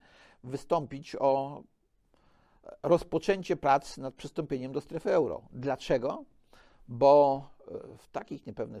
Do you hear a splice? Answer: no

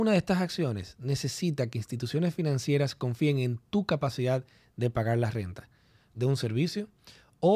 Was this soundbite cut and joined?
yes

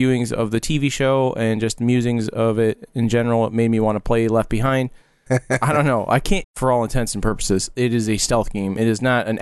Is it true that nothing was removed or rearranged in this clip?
no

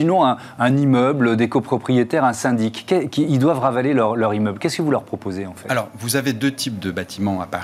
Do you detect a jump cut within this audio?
no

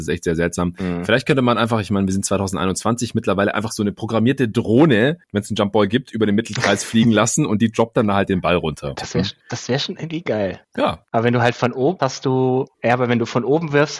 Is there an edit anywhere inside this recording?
yes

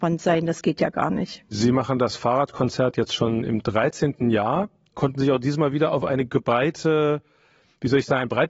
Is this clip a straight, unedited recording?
yes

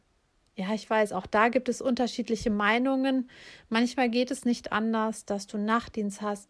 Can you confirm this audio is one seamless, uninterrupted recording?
yes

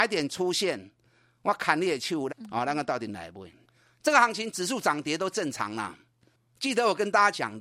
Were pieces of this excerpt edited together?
yes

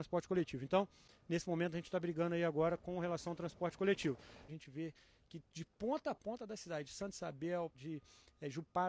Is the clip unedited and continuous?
no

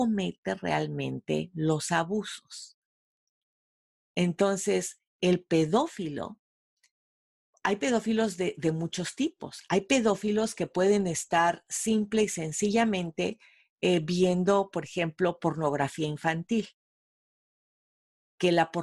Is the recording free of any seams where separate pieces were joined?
yes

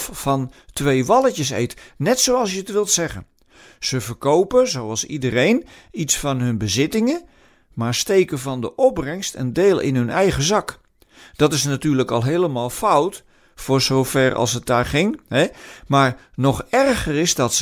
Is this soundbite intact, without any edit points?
yes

